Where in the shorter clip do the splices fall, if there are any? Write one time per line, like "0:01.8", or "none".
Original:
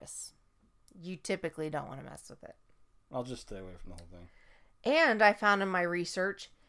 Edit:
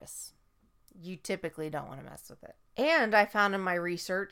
0:02.7